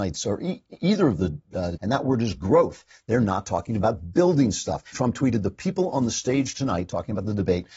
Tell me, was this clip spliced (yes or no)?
yes